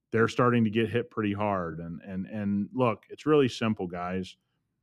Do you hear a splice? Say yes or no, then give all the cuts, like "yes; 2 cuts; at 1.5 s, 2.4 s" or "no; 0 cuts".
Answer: no; 0 cuts